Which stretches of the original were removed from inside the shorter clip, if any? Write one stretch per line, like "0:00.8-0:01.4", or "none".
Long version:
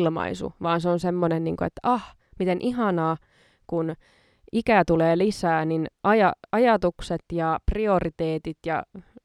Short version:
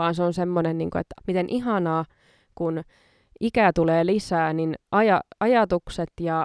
0:01.8-0:02.3